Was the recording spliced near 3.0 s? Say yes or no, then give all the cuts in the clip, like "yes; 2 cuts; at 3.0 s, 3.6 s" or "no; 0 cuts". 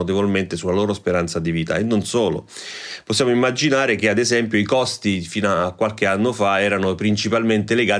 no; 0 cuts